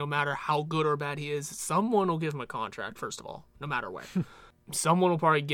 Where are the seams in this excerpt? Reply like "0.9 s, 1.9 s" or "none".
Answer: none